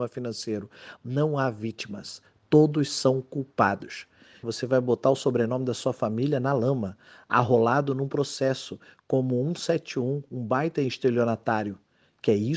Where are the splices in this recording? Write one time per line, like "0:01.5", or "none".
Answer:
0:04.4